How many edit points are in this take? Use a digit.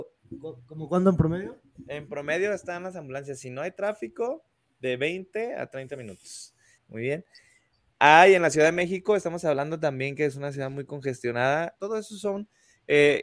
2